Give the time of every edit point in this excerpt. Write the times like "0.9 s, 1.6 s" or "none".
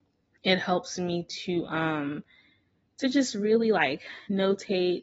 none